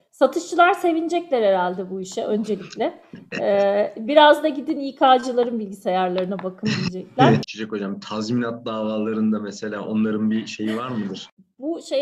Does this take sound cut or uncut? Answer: cut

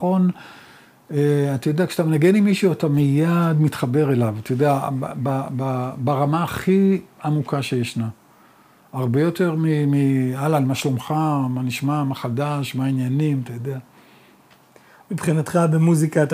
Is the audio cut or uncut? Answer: uncut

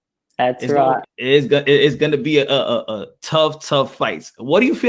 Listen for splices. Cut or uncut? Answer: cut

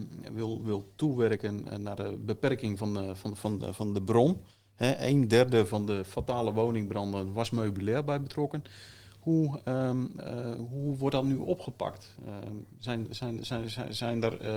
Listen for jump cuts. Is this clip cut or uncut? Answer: uncut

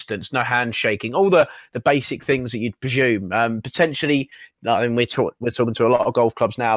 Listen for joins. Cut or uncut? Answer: uncut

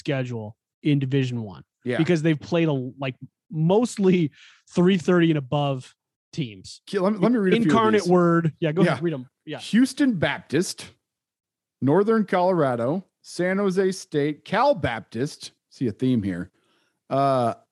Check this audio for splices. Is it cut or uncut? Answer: uncut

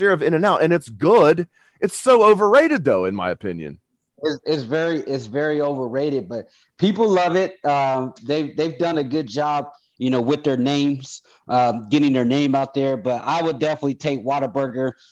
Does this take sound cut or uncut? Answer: uncut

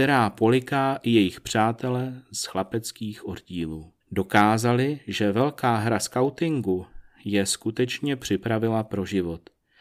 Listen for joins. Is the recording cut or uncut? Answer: cut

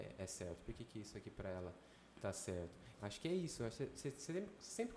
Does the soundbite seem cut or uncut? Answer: cut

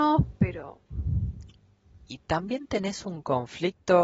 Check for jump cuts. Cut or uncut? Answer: cut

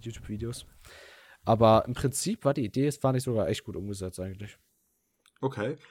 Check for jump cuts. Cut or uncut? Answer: uncut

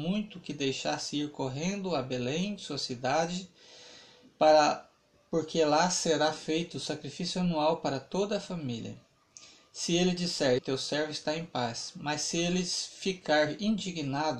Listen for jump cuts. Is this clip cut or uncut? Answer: cut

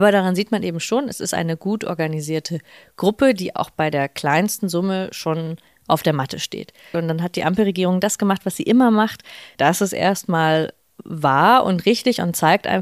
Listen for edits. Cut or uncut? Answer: cut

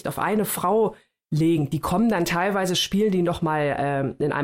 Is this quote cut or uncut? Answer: uncut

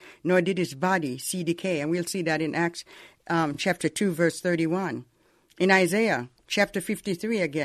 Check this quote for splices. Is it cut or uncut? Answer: uncut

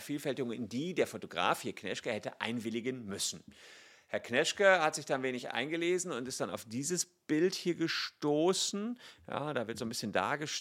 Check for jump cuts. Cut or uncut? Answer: uncut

